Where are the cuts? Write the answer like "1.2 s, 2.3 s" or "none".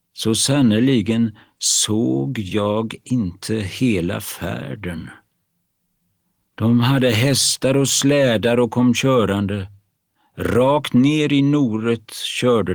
none